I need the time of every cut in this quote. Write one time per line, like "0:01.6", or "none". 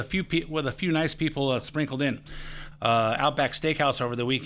0:02.7